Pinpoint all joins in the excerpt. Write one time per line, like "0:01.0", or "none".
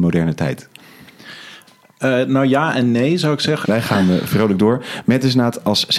0:03.6

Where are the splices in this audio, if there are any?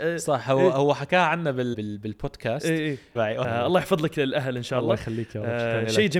0:01.7
0:03.2

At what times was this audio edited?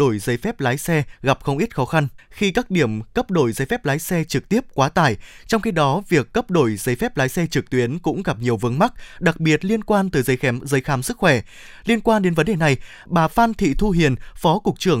0:02.2

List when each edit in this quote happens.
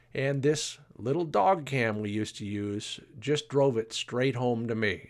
none

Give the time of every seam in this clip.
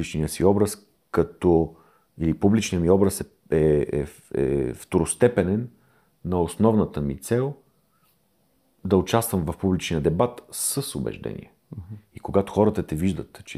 none

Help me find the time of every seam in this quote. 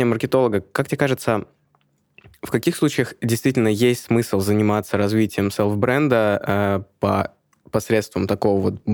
none

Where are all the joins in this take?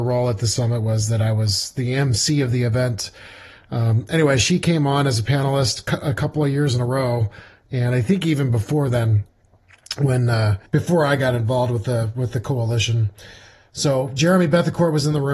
0:10.7

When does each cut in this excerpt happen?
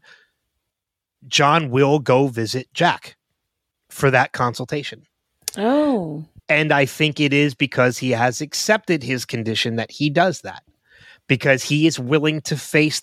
0:06.4

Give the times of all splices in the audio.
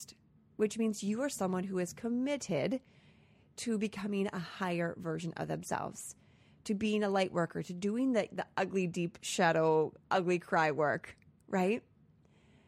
none

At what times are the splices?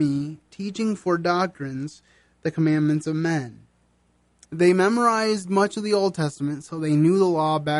0:04.4

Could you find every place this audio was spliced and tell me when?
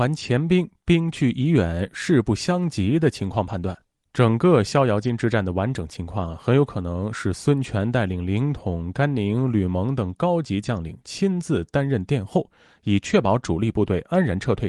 none

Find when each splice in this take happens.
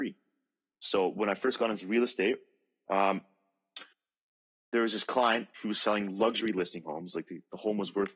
none

